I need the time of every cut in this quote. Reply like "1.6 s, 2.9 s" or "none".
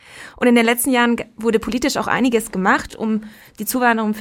none